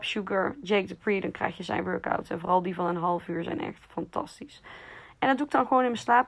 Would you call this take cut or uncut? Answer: uncut